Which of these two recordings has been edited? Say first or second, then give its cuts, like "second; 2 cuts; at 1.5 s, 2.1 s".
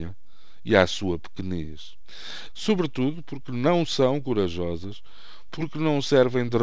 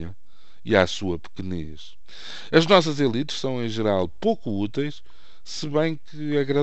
first; 1 cut; at 2.5 s